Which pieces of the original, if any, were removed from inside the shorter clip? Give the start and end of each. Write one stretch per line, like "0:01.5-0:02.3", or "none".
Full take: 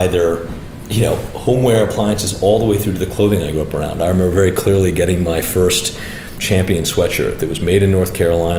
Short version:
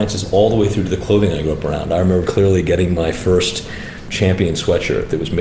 0:04.3-0:04.5

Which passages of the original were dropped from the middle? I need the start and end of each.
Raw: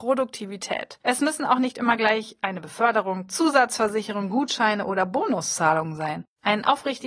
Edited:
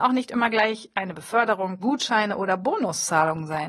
0:03.3-0:04.3

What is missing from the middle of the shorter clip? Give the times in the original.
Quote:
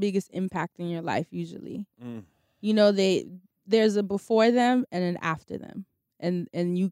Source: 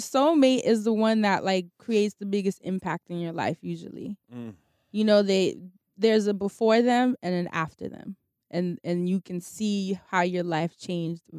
none

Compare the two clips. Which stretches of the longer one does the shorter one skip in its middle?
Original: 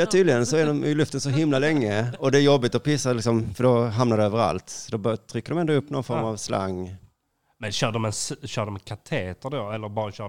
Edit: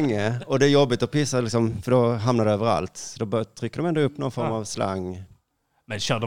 none

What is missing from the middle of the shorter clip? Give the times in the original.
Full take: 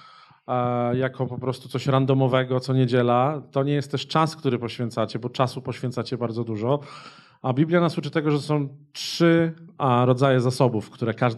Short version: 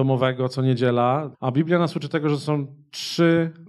0:03.5-0:07.4

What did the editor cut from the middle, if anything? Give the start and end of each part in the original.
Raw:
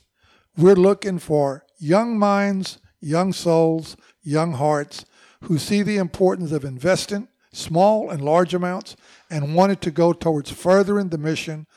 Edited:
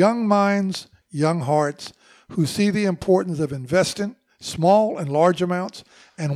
0:02.9-0:04.1

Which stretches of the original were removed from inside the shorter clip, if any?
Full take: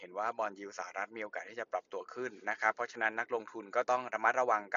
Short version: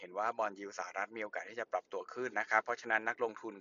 0:02.3-0:02.4

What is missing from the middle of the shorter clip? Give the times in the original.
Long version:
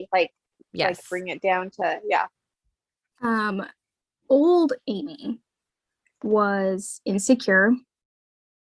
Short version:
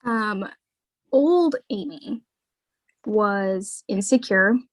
none

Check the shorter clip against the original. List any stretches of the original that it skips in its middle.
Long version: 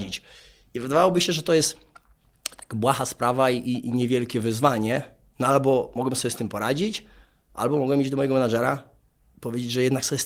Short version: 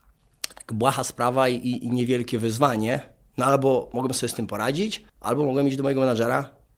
0:07.1-0:07.4

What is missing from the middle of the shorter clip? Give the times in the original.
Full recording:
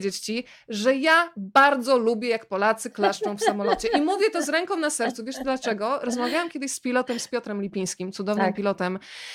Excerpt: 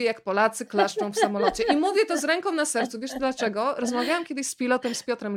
none

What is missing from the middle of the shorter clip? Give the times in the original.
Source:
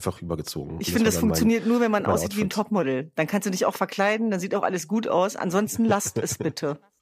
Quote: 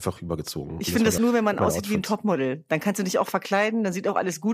0:01.2-0:01.6

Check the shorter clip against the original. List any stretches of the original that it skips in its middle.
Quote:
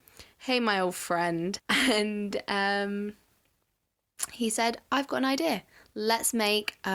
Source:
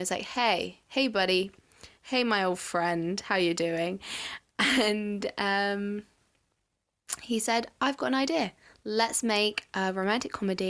0:03.2-0:04.5

